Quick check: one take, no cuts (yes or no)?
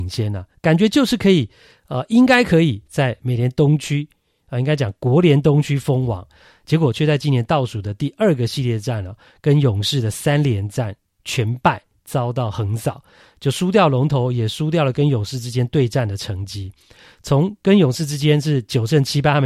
yes